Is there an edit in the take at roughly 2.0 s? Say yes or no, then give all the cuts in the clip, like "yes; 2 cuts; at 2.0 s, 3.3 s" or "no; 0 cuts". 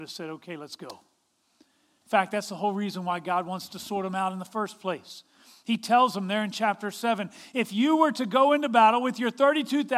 yes; 1 cut; at 2.0 s